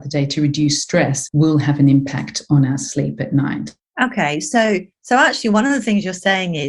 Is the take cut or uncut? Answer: uncut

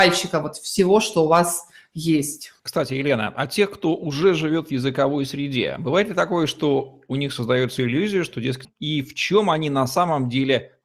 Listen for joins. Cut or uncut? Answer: cut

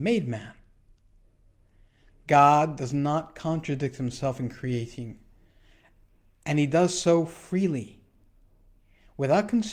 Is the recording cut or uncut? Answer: uncut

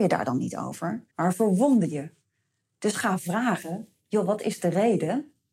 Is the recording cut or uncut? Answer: cut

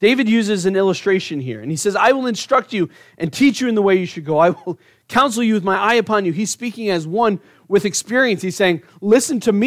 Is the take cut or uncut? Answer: uncut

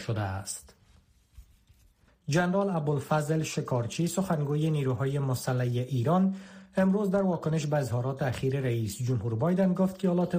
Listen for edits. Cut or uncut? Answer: cut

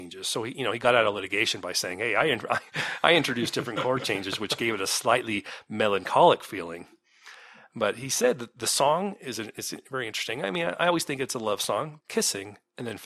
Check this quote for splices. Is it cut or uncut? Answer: cut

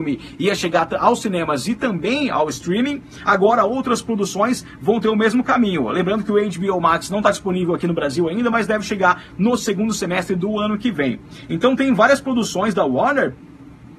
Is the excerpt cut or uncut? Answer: uncut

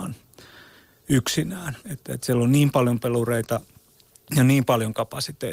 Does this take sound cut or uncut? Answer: cut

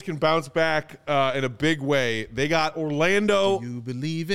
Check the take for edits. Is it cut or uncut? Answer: uncut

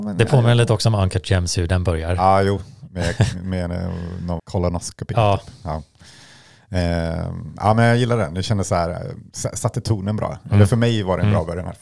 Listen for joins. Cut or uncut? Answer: cut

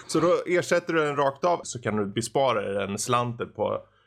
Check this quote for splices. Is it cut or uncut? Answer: cut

